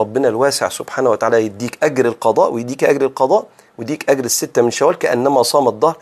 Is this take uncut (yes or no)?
yes